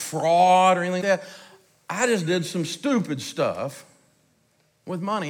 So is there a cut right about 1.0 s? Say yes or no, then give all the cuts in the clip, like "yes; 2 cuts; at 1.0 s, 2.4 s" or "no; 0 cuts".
yes; 1 cut; at 1.0 s